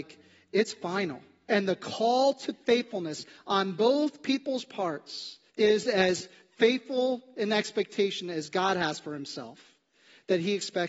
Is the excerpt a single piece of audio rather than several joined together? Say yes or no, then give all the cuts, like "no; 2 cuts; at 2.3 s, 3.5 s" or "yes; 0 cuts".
no; 2 cuts; at 1.5 s, 5.5 s